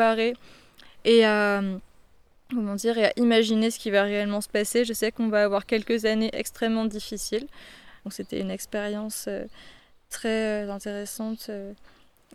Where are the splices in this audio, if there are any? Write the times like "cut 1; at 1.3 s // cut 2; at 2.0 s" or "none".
cut 1; at 8.0 s